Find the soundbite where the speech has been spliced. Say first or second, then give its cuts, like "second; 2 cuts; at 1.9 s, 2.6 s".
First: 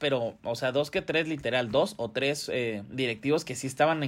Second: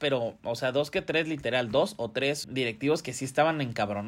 second; 1 cut; at 2.4 s